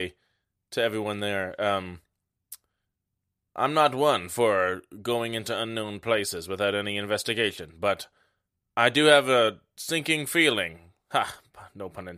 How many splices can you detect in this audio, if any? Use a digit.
0